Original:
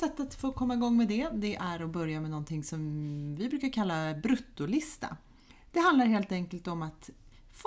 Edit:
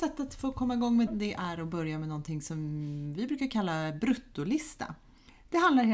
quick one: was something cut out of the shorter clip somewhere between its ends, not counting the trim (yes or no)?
yes